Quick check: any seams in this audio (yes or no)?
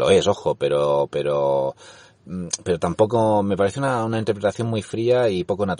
no